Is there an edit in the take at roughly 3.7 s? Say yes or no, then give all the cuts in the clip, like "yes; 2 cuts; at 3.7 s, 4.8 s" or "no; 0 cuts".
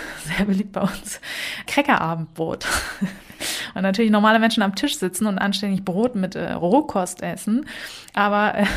no; 0 cuts